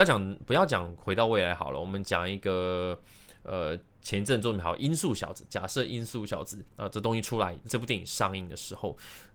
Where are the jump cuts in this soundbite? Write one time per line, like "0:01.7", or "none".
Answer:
0:06.7
0:07.7